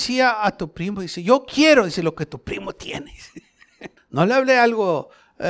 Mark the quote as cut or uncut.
cut